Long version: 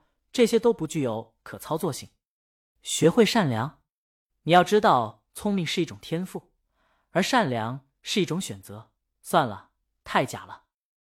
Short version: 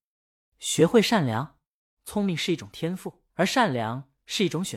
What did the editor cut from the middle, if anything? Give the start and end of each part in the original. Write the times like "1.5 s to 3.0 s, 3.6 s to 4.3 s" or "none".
4.2 s to 5.3 s, 6.6 s to 7.1 s